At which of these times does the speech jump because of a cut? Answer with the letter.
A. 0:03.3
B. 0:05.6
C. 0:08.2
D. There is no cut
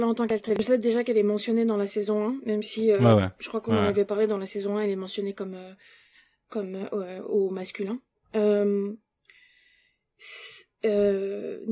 D